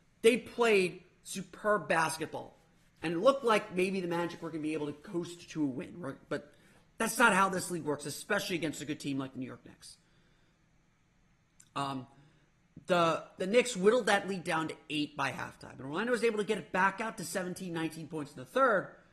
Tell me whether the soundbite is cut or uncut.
uncut